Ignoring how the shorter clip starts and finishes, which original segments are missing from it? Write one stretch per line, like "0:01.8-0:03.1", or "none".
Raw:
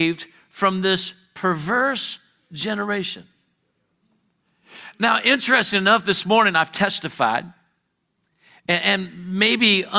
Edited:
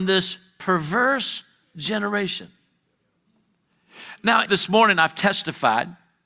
0:05.2-0:06.0